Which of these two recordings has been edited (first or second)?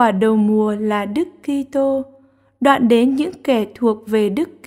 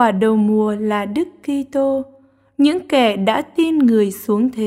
second